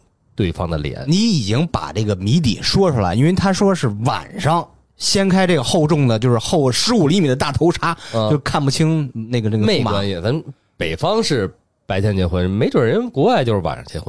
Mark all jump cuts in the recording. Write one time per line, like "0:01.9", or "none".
none